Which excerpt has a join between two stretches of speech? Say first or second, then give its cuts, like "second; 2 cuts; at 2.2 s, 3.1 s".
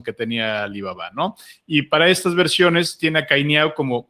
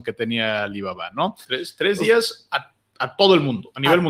second; 1 cut; at 1.4 s